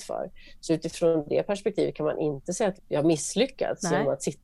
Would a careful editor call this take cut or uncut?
cut